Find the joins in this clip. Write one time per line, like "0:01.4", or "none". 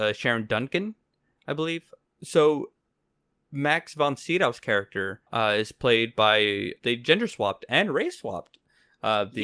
0:02.0
0:05.3
0:06.8